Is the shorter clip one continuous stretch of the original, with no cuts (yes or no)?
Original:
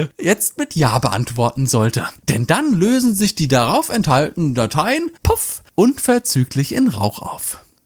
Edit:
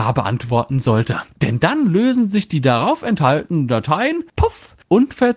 yes